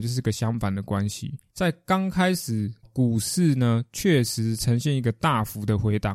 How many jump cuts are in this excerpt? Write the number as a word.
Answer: two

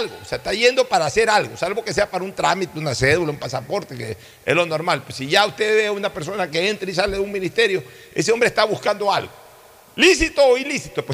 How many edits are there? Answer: zero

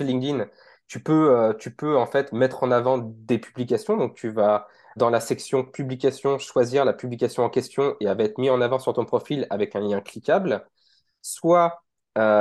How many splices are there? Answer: one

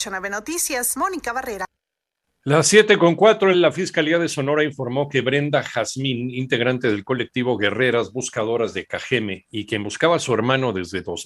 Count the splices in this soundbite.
one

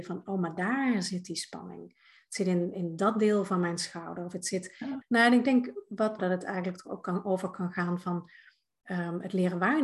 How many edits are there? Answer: two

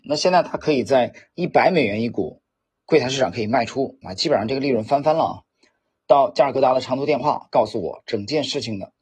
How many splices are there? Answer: one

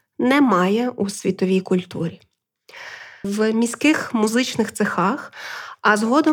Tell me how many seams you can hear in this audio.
one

